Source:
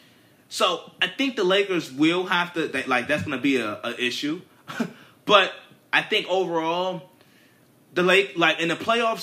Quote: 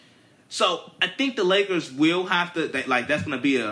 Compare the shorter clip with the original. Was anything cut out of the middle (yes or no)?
no